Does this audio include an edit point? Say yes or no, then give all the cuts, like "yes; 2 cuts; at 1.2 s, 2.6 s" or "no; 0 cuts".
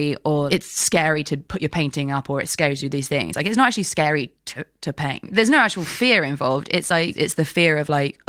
no; 0 cuts